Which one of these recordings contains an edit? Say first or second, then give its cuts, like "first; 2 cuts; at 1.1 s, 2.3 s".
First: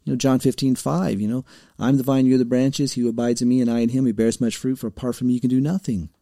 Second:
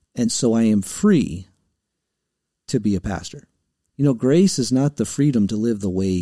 second; 1 cut; at 3.9 s